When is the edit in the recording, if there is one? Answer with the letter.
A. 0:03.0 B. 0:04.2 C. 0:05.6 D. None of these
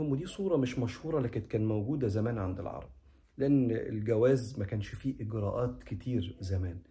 D